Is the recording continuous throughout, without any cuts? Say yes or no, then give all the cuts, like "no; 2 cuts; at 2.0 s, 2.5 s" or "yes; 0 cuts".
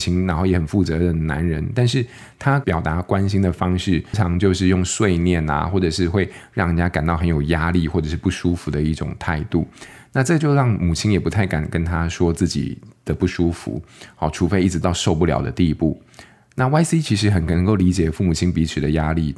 no; 1 cut; at 4.1 s